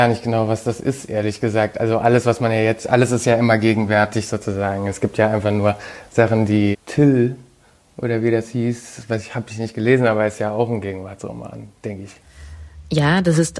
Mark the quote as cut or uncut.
cut